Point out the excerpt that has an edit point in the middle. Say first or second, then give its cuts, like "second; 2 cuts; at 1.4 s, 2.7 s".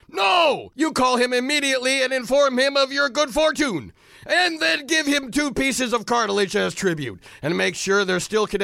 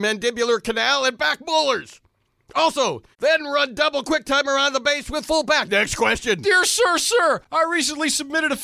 second; 1 cut; at 3.1 s